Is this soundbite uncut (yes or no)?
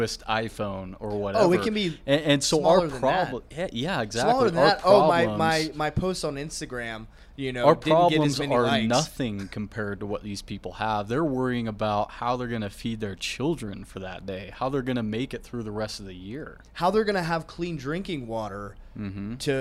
yes